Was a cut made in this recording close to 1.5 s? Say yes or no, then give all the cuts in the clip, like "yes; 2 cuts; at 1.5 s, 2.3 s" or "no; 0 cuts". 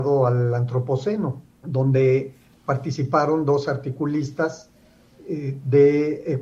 yes; 1 cut; at 1.5 s